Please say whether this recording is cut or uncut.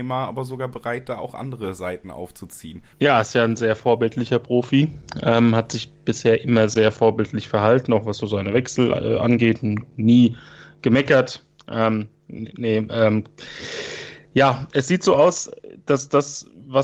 cut